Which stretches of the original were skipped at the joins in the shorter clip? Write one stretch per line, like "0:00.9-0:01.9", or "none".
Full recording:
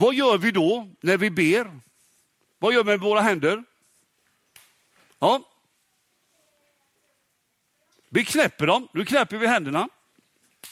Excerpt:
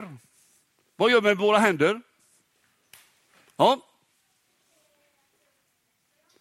none